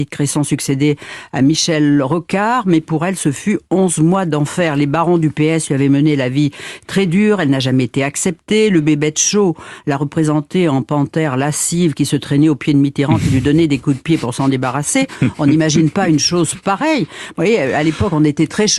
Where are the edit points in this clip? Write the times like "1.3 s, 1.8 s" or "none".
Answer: none